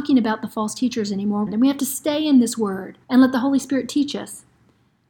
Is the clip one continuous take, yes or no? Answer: no